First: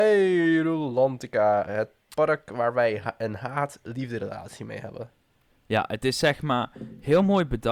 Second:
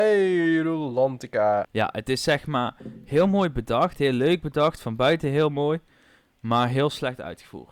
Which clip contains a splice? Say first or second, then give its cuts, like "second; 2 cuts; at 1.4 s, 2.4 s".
second; 1 cut; at 1.6 s